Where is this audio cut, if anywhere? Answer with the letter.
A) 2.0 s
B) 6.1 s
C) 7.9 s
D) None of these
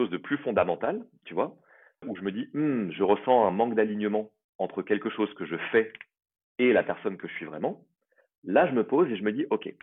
A